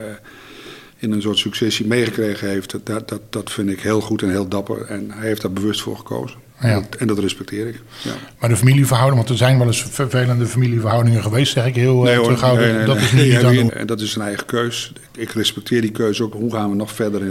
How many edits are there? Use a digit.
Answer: 2